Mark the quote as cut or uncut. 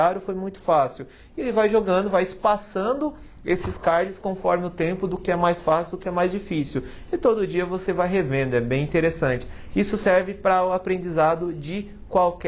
uncut